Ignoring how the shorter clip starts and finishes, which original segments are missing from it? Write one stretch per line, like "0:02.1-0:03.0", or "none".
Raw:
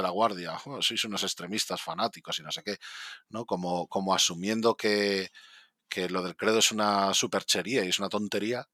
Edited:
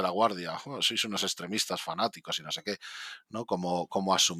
none